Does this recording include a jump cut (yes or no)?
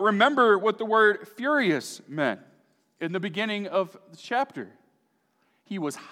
no